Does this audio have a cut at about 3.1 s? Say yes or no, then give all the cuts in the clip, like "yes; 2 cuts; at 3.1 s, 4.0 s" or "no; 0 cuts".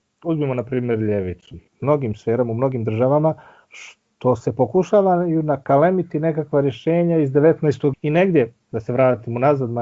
no; 2 cuts; at 1.7 s, 7.9 s